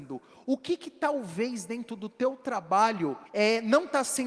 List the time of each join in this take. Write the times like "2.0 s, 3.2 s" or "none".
3.3 s